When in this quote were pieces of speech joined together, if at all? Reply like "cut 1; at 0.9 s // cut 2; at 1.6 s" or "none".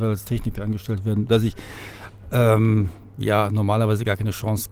cut 1; at 1.3 s